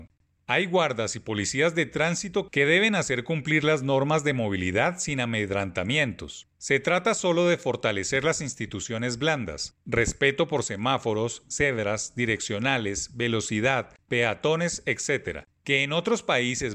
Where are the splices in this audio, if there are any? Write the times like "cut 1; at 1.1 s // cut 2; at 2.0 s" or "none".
none